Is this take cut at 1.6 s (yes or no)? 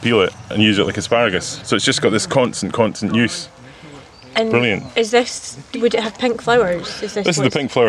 yes